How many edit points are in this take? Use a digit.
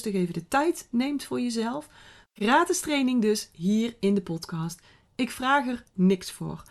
1